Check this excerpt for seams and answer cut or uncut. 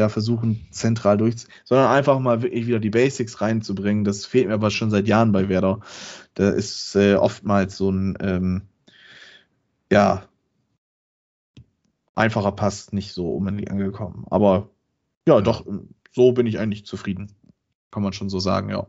uncut